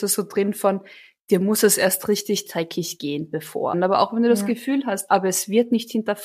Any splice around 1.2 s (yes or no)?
no